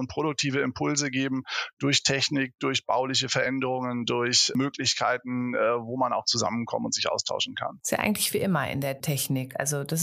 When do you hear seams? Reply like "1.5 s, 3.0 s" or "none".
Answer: none

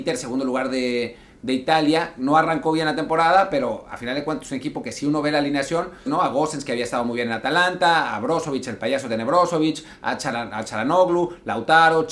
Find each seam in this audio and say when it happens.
6.1 s

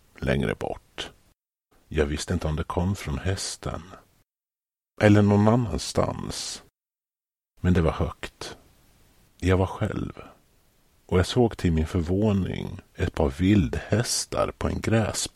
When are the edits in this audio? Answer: 1.7 s, 9.3 s, 12.9 s

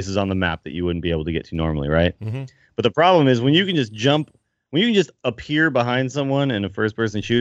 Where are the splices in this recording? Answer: none

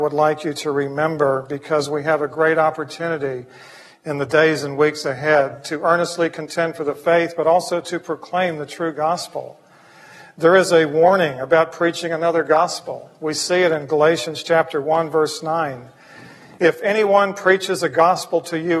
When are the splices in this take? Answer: none

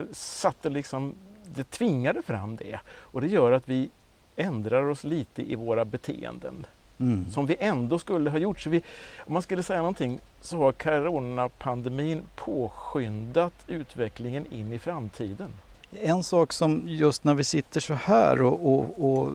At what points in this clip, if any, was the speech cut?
none

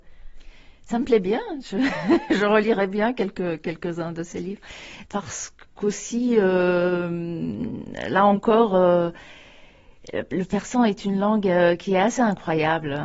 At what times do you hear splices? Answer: 5.0 s

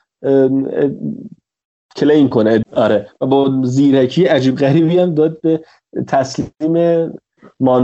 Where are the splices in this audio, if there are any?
2.6 s

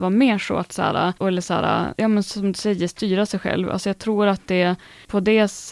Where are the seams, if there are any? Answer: 1.2 s

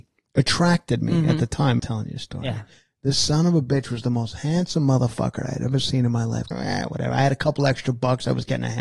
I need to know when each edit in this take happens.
1.8 s, 6.5 s

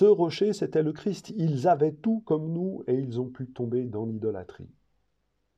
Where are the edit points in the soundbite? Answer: none

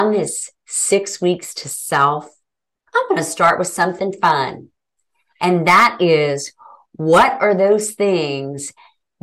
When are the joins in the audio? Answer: none

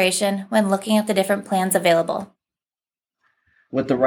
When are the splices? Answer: none

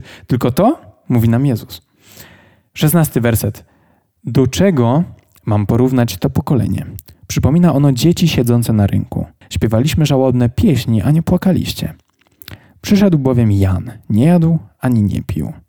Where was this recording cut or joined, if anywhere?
9.4 s

